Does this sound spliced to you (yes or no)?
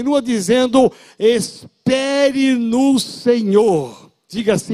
no